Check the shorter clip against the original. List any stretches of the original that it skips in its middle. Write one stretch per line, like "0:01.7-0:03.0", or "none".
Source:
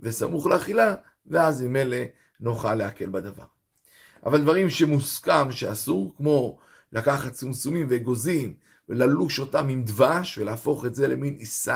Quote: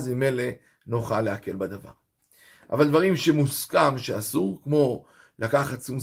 none